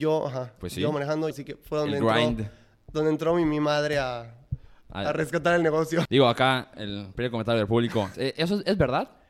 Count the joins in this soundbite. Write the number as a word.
three